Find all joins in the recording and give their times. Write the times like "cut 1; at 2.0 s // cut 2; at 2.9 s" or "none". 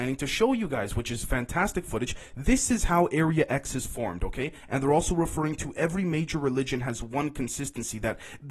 cut 1; at 4.7 s